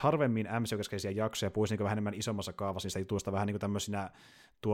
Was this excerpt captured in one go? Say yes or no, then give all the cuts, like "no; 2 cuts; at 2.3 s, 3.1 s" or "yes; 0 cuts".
yes; 0 cuts